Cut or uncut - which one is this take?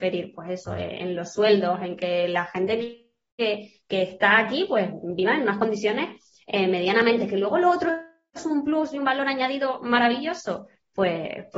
uncut